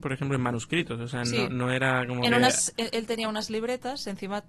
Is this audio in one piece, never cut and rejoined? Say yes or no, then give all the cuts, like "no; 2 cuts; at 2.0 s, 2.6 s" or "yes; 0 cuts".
yes; 0 cuts